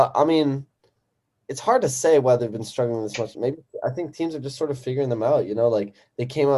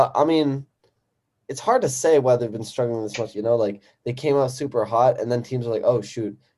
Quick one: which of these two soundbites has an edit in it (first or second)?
second